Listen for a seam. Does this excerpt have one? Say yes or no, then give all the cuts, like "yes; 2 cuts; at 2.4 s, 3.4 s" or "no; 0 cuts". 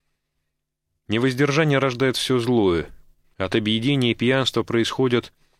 yes; 1 cut; at 3.3 s